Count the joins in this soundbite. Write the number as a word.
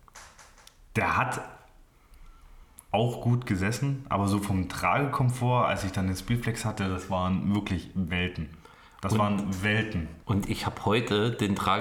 one